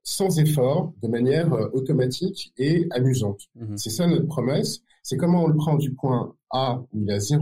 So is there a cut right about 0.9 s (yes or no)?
no